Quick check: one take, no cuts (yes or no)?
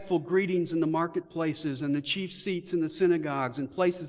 yes